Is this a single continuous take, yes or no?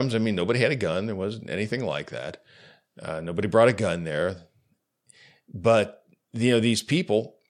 yes